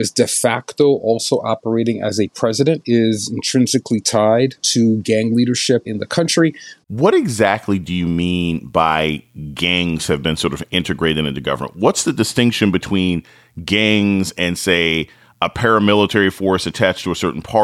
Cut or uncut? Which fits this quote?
cut